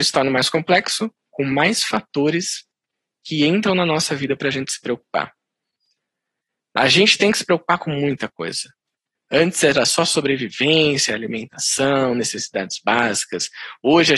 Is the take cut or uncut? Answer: uncut